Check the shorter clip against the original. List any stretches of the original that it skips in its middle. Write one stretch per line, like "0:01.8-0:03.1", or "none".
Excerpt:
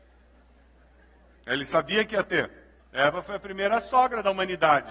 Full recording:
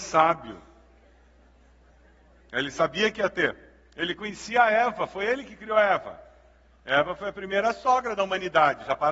0:03.8-0:06.7